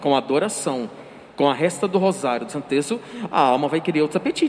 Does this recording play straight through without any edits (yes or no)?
yes